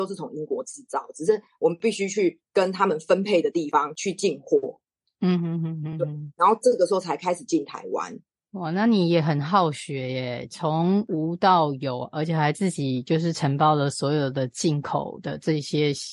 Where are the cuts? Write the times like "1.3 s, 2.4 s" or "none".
none